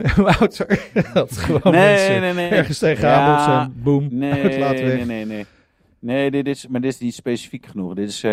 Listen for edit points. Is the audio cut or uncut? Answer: uncut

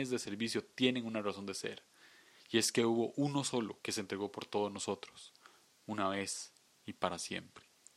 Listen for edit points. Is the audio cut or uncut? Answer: cut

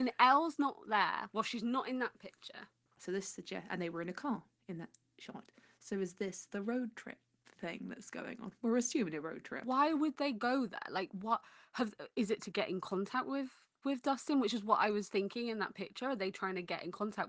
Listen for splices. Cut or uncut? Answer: cut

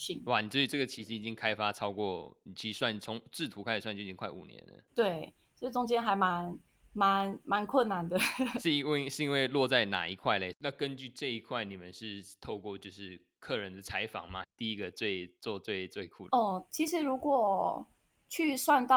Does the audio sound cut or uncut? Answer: cut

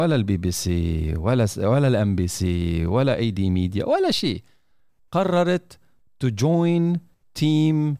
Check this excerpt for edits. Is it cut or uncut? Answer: uncut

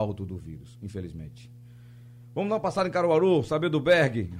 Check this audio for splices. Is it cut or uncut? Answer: uncut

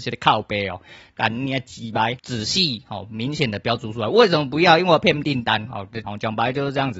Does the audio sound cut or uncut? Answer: cut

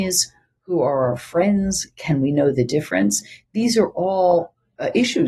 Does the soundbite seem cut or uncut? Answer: uncut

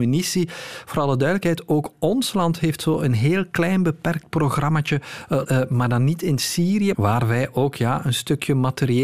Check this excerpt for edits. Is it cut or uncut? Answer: cut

